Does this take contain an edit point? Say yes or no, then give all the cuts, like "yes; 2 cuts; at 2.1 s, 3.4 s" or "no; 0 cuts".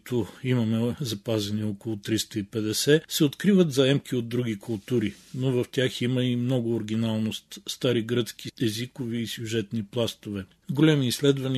yes; 1 cut; at 10.6 s